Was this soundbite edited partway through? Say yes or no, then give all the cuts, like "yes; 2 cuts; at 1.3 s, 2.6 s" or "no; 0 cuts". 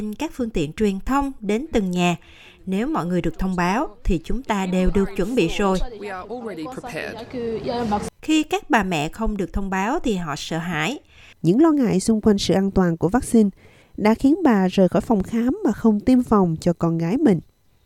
yes; 2 cuts; at 8.2 s, 11.3 s